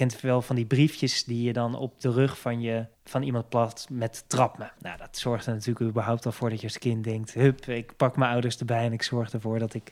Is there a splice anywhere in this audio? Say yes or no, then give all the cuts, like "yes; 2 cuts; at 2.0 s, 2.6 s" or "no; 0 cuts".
yes; 2 cuts; at 2.9 s, 4.8 s